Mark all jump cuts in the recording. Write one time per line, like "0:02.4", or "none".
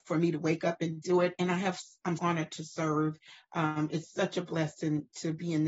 0:02.2